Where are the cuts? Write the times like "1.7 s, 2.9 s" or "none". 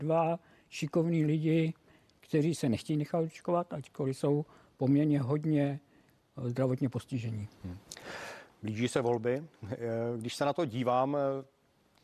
none